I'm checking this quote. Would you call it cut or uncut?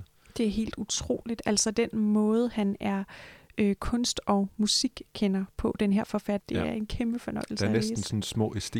cut